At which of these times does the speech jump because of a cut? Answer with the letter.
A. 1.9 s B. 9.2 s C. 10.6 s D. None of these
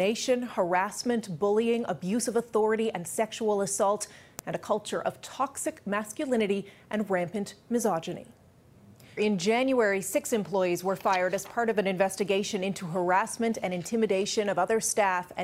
B